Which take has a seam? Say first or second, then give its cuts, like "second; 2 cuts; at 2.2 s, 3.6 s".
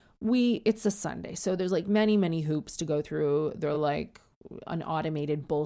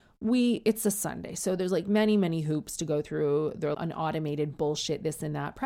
second; 1 cut; at 3.7 s